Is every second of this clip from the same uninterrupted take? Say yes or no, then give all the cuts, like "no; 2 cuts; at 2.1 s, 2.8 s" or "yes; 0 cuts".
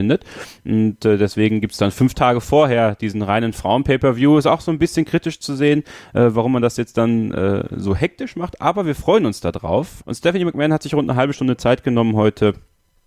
no; 1 cut; at 10.0 s